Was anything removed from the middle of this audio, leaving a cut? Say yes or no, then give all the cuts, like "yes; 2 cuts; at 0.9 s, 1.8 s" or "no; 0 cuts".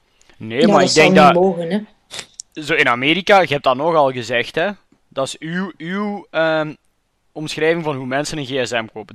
no; 0 cuts